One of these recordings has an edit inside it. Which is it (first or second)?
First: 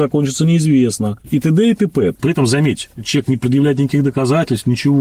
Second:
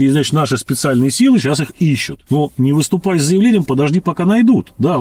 first